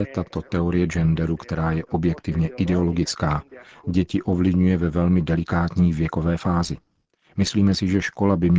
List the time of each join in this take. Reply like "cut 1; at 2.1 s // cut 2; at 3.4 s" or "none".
none